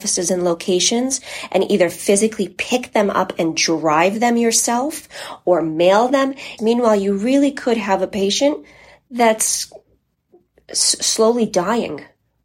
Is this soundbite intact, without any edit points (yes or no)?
no